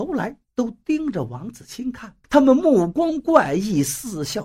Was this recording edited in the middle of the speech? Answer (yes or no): yes